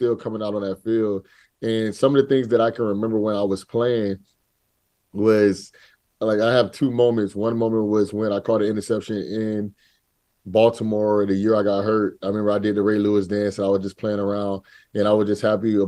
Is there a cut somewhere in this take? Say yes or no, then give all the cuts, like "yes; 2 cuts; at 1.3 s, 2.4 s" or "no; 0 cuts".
no; 0 cuts